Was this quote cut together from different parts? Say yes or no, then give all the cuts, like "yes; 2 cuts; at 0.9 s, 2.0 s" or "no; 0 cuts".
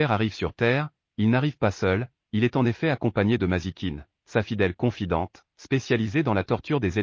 no; 0 cuts